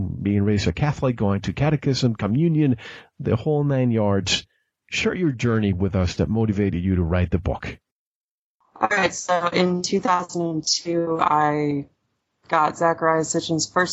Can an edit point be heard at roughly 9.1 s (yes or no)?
no